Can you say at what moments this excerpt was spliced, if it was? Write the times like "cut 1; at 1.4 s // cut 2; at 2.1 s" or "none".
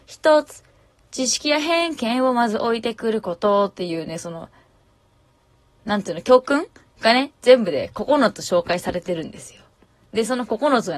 none